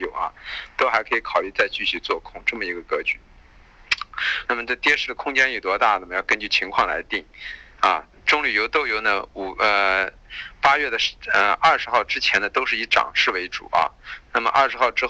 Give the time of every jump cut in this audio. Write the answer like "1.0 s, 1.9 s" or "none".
4.4 s, 8.1 s